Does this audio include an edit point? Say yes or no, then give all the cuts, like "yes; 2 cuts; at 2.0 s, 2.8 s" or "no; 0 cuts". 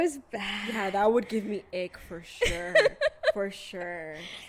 no; 0 cuts